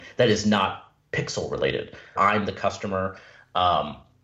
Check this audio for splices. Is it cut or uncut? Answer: cut